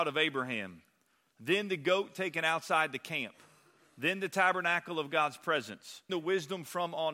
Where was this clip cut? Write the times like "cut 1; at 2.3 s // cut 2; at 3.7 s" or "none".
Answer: cut 1; at 6.1 s